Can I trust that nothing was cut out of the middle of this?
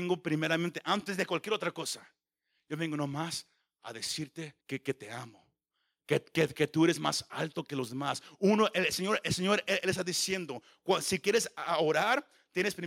no; 1 cut; at 4.6 s

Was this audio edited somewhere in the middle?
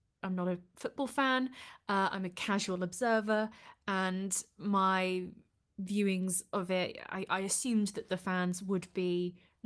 no; 0 cuts

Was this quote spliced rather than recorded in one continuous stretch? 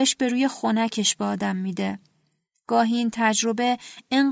no; 0 cuts

